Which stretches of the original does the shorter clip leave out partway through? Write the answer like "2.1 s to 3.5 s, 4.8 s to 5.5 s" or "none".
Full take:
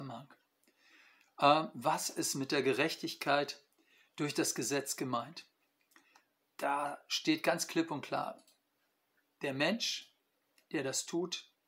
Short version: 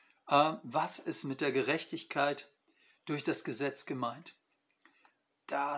none